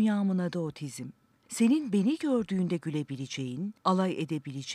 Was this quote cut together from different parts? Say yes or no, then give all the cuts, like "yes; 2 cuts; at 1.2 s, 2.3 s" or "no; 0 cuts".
no; 0 cuts